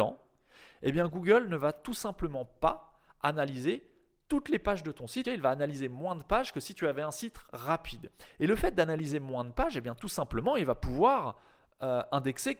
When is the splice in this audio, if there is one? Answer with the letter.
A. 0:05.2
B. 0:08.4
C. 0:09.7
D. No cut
A